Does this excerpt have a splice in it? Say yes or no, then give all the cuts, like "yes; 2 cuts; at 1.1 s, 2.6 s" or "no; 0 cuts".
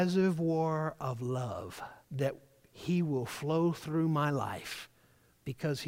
yes; 1 cut; at 2.0 s